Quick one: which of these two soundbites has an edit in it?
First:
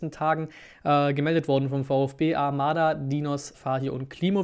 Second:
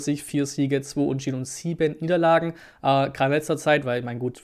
first; 1 cut; at 3.5 s

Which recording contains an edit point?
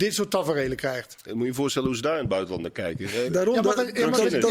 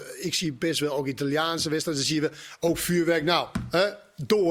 first; 2 cuts; at 1.2 s, 3.3 s

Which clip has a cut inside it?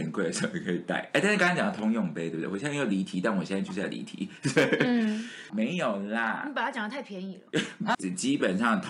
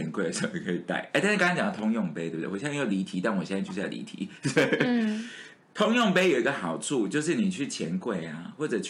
first; 2 cuts; at 5.5 s, 7.9 s

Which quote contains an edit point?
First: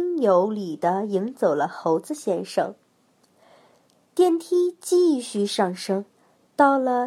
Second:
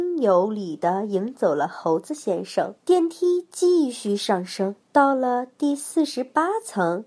second; 2 cuts; at 2.8 s, 4.8 s

